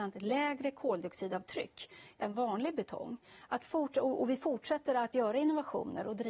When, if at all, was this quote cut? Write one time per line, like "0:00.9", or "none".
none